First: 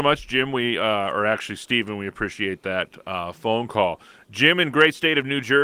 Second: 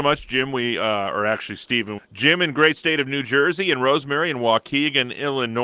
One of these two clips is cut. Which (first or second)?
second